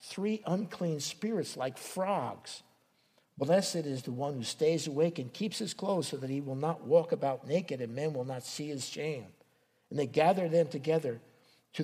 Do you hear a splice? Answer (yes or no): yes